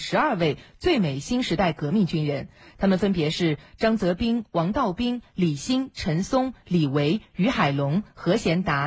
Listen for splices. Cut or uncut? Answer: uncut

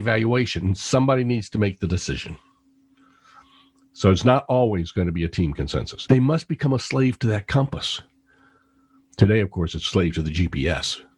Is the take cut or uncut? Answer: cut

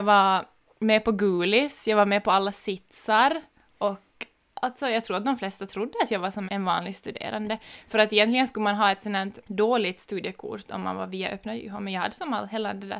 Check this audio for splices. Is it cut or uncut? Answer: cut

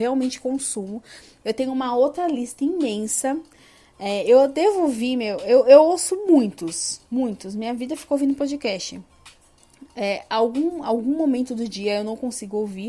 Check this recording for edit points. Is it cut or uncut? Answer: uncut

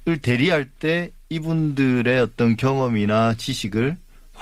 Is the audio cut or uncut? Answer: uncut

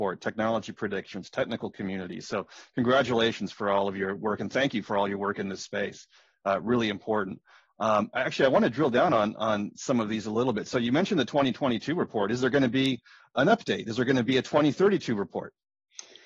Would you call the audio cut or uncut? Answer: uncut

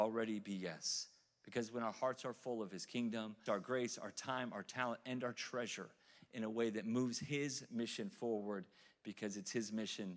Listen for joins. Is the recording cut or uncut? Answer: cut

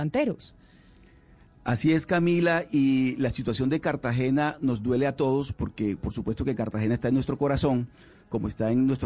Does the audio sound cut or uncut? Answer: uncut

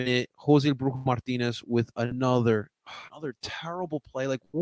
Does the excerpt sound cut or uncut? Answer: cut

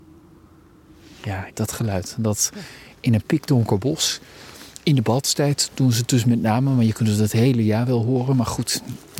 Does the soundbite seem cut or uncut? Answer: cut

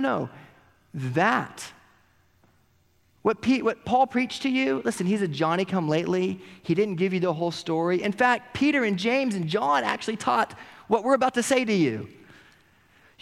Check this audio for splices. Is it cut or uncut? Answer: uncut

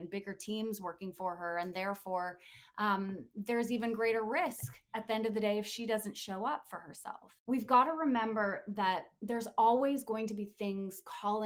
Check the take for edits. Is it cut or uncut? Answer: uncut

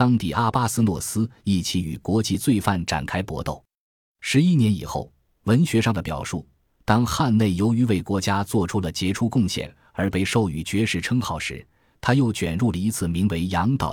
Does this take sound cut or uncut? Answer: uncut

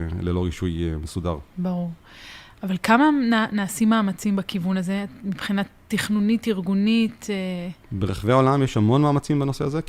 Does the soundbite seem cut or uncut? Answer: cut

